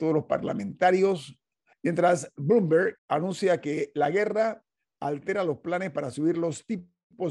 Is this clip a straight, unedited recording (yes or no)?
no